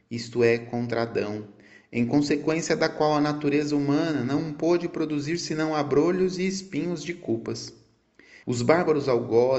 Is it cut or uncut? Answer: cut